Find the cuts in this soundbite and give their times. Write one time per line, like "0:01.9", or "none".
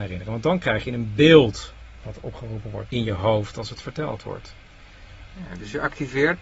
0:02.9
0:05.3